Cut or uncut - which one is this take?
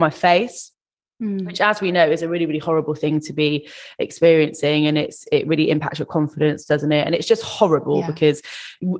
uncut